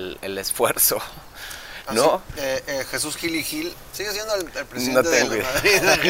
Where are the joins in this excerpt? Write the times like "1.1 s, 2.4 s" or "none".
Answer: none